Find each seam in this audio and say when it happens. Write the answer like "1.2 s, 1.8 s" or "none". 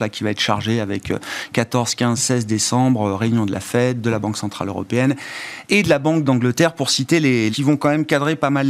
7.5 s